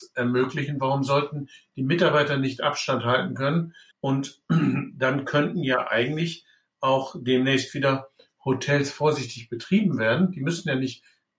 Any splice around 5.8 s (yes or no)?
no